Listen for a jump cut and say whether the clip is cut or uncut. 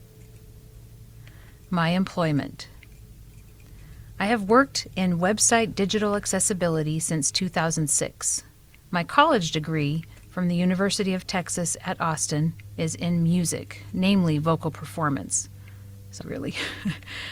cut